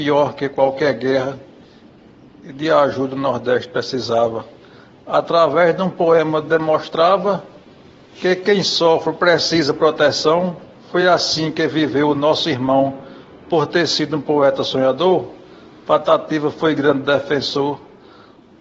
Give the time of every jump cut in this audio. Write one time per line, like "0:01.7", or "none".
none